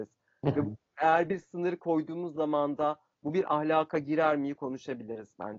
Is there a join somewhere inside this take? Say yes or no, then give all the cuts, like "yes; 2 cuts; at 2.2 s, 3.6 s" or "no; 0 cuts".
no; 0 cuts